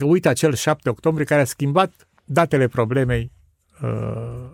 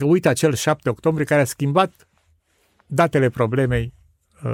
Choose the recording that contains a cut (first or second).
first